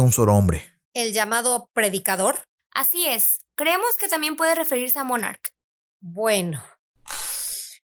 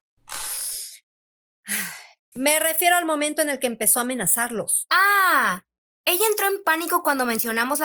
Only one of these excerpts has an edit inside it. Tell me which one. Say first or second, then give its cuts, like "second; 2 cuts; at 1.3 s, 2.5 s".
second; 1 cut; at 2.3 s